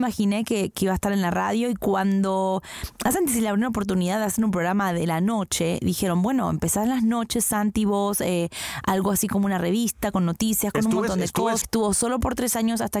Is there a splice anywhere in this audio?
yes; 1 cut; at 11.6 s

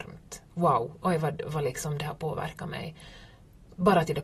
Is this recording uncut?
no; 1 cut; at 1.0 s

